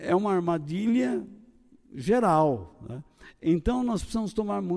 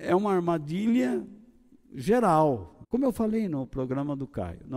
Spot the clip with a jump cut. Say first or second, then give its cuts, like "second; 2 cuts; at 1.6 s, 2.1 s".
second; 1 cut; at 2.8 s